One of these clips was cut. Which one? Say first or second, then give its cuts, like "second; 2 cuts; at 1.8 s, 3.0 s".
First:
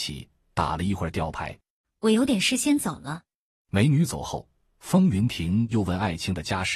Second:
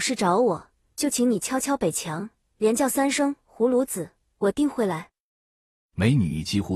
first; 2 cuts; at 1.8 s, 3.5 s